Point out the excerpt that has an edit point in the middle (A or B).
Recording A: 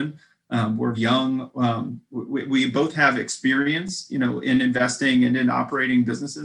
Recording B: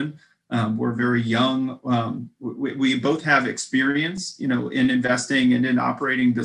A